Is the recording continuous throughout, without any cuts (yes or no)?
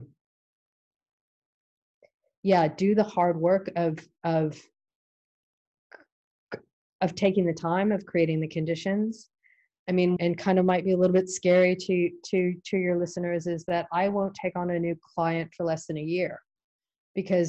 no